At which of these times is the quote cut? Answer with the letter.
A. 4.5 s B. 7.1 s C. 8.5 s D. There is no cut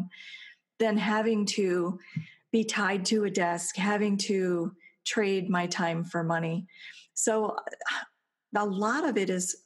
D